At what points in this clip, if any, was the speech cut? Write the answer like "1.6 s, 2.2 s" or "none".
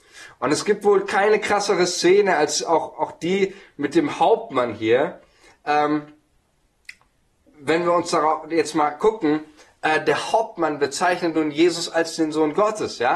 none